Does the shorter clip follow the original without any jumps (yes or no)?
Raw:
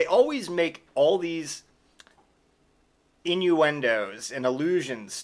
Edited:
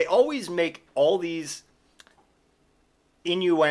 yes